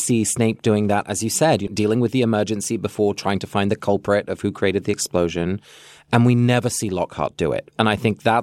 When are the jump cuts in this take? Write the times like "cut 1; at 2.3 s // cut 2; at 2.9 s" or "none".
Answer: cut 1; at 1.7 s